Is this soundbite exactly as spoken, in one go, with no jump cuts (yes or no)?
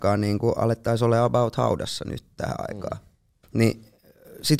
no